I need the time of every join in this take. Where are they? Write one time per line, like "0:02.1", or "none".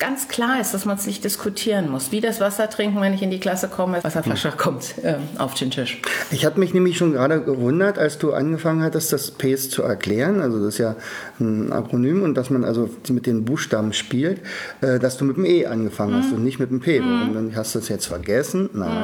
0:04.0